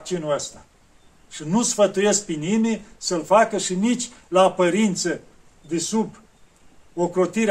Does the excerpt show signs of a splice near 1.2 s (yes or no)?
no